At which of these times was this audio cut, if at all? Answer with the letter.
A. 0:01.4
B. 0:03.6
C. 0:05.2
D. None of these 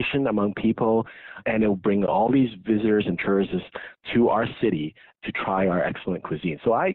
A